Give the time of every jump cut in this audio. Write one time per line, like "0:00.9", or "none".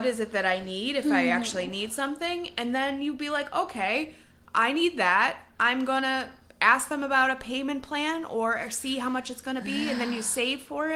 none